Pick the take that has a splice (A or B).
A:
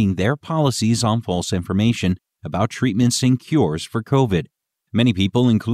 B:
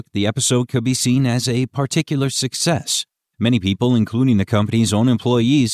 A